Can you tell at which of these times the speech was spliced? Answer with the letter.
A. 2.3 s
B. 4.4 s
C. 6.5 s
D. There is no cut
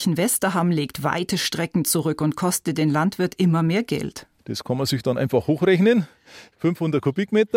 B